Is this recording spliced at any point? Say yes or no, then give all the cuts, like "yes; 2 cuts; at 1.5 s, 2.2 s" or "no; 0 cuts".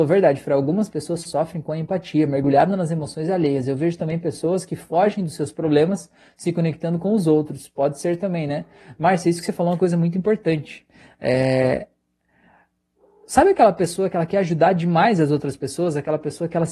no; 0 cuts